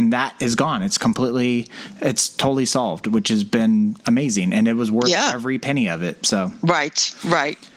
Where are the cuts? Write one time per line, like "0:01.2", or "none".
none